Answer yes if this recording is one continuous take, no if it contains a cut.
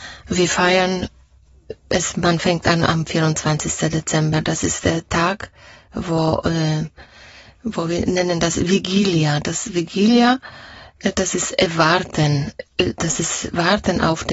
yes